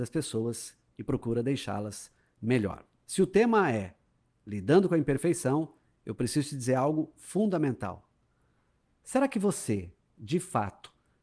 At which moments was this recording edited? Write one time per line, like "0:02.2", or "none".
none

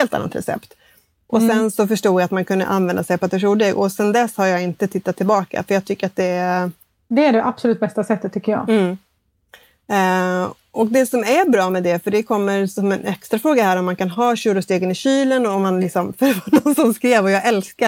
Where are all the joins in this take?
none

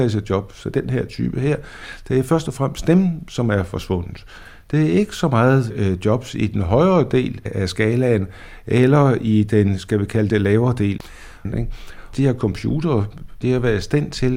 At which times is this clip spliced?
0:11.5

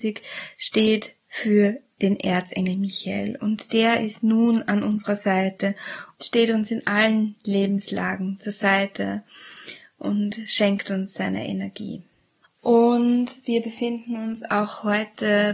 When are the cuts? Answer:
0:06.1
0:12.4

